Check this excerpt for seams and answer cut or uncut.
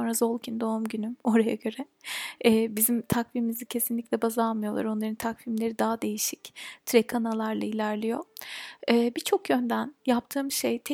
uncut